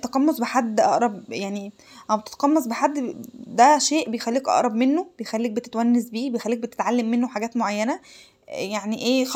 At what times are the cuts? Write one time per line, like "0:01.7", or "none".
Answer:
none